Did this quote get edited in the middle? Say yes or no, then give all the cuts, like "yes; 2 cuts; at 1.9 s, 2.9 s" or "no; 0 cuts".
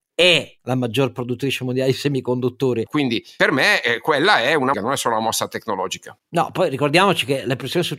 yes; 2 cuts; at 2.9 s, 4.7 s